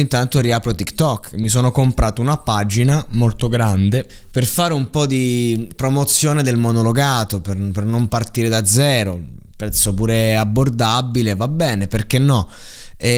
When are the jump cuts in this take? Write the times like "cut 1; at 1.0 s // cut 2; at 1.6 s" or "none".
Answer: none